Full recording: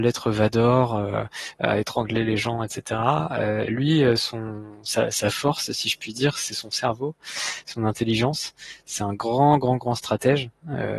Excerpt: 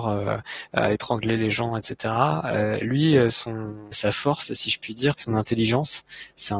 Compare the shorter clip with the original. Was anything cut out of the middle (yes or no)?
yes